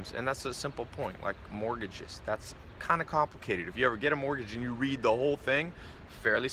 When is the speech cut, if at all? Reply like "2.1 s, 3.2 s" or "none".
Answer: none